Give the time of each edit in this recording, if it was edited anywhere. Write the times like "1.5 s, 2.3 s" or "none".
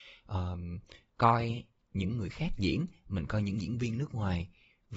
1.1 s